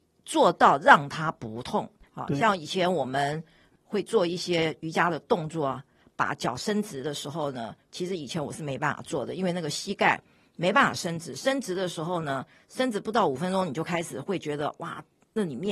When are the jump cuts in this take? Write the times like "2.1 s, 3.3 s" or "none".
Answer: none